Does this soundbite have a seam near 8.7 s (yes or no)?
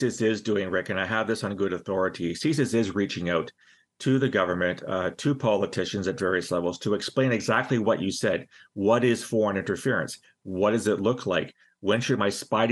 no